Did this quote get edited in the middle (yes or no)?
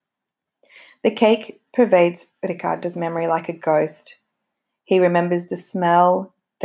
no